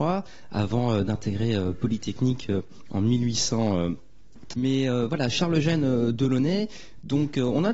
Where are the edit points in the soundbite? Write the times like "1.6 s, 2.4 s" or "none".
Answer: 4.5 s